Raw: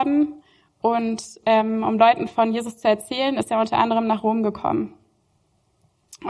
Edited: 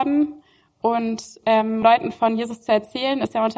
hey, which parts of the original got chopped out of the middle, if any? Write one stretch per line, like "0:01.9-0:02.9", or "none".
0:01.8-0:02.0